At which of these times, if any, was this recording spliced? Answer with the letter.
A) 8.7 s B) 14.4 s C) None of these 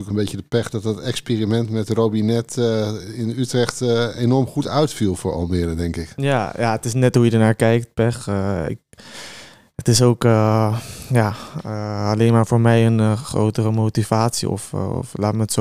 C